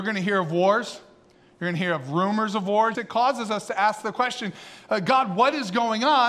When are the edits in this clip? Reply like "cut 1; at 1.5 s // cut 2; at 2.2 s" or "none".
cut 1; at 2.9 s